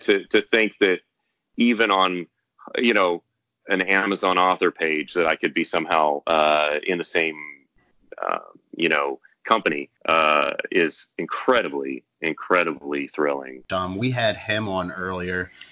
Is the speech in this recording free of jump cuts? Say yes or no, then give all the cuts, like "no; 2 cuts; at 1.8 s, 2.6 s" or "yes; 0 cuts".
no; 2 cuts; at 10.0 s, 13.7 s